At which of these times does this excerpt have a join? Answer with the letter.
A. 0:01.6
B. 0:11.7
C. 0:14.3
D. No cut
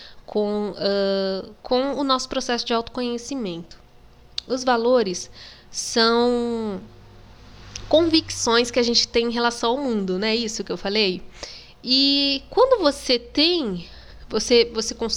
A